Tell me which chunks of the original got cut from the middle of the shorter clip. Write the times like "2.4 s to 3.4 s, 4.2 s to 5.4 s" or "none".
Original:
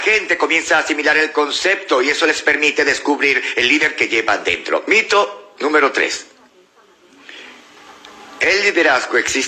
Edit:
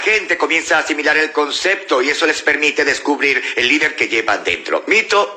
none

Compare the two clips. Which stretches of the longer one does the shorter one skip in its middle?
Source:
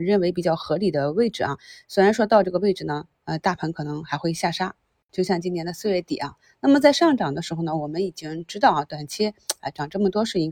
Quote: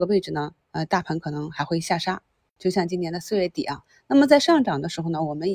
none

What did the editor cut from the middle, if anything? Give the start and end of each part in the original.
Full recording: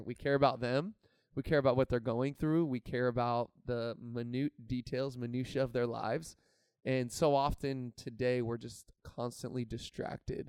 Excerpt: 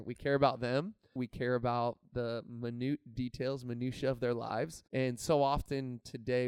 1.2 s to 2.7 s, 6.4 s to 6.8 s

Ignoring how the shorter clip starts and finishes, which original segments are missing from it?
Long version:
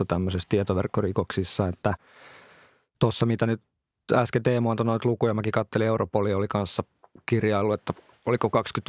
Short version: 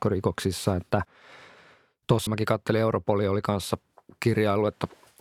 3.2 s to 5.3 s

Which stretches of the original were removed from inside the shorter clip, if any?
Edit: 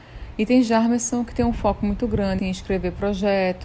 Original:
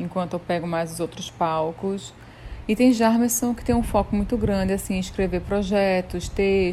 4.7 s to 4.9 s

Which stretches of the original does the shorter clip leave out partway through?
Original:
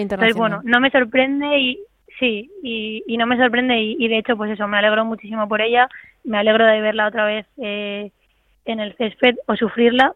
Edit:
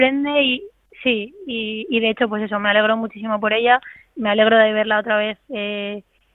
3.0 s to 4.0 s

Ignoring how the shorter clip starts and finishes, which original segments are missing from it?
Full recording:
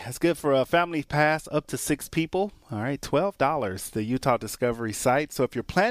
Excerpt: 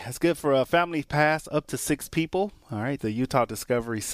3.0 s to 3.9 s

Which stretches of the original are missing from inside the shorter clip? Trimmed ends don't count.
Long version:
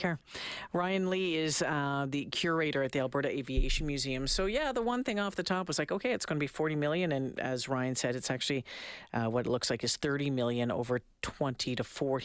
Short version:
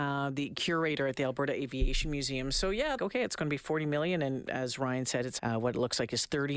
4.7 s to 5.9 s, 8.3 s to 9.1 s

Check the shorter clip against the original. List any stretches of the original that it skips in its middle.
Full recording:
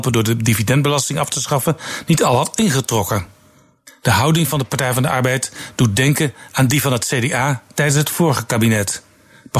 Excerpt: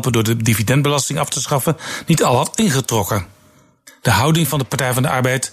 none

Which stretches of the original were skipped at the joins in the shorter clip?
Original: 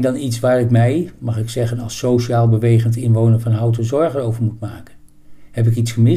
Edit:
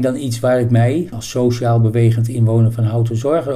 1.1 s to 1.8 s

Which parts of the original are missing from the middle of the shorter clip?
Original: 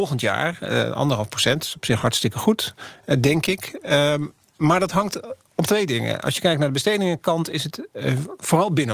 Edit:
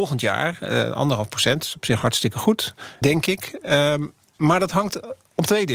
3.0 s to 3.2 s

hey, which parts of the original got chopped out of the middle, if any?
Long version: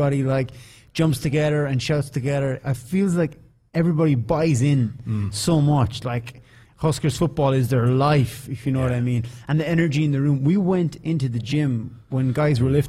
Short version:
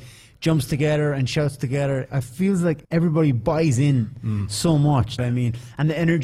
3.4 s to 3.7 s, 6.0 s to 8.9 s

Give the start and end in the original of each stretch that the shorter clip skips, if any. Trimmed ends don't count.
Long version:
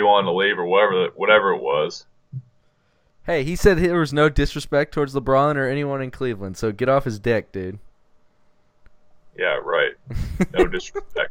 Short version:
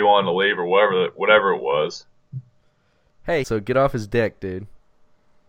3.4 s to 6.6 s

